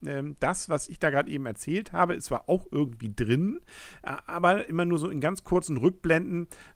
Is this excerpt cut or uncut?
uncut